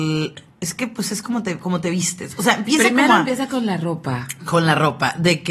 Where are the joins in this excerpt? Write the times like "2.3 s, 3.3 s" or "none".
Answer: none